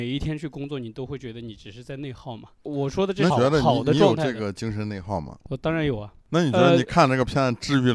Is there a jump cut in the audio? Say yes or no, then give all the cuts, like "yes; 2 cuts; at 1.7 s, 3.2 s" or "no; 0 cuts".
yes; 1 cut; at 3.3 s